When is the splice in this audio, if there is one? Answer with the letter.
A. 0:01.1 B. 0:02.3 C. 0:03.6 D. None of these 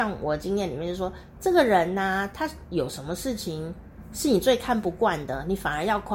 D